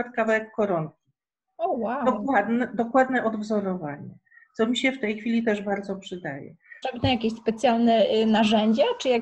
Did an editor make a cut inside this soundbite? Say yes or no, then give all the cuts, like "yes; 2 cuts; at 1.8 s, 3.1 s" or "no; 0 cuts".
yes; 1 cut; at 6.8 s